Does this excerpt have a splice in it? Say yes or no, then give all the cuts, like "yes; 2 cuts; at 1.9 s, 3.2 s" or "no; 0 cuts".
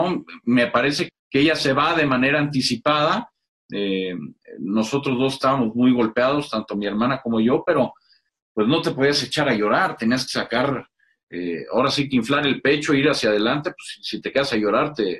yes; 1 cut; at 1.1 s